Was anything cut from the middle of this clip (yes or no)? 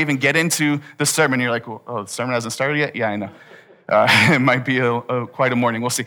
no